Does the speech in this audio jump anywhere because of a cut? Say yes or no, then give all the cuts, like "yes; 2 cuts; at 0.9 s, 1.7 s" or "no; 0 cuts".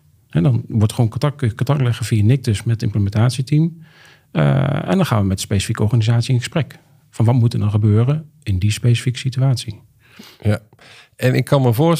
no; 0 cuts